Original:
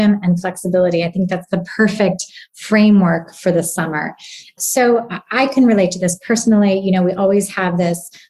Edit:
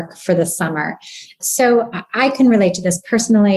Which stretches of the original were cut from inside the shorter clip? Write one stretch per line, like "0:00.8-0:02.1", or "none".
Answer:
none

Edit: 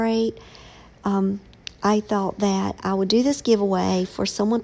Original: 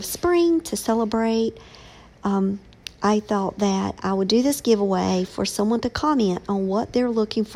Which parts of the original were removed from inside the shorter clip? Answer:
none

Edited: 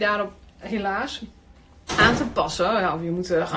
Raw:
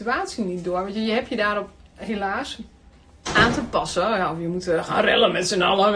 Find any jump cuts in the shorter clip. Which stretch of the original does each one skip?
none

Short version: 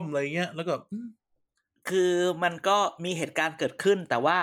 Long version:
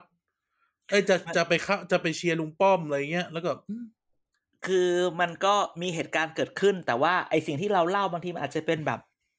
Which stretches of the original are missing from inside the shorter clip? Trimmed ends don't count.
none

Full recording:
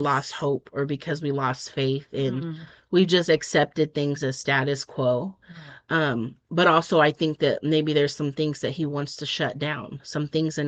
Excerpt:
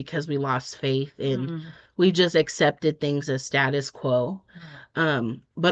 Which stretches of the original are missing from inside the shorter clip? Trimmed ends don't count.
none

